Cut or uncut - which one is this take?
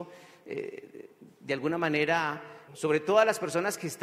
cut